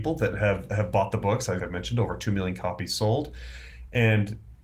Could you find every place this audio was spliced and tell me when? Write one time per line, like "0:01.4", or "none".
0:01.6